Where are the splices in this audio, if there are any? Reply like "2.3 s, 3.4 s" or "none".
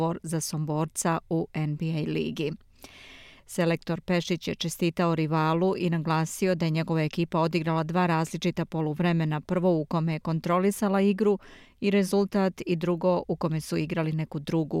3.4 s